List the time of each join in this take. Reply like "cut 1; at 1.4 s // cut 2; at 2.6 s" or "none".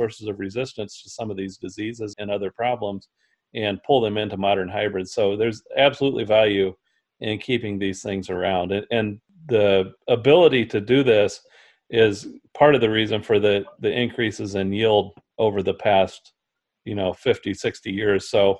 cut 1; at 2.1 s